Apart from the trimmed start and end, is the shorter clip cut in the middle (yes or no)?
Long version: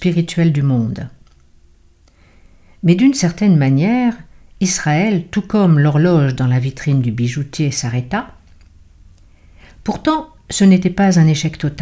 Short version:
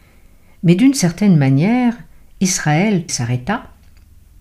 yes